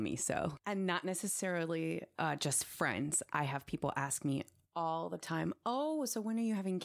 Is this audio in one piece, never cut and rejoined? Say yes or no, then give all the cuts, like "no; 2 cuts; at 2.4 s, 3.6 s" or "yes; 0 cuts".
yes; 0 cuts